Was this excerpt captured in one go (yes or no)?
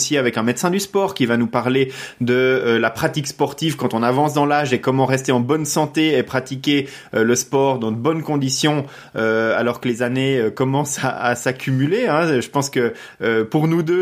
yes